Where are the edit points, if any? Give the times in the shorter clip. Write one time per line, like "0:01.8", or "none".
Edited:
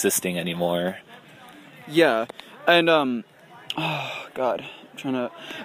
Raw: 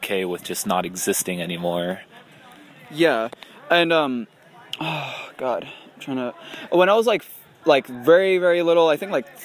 none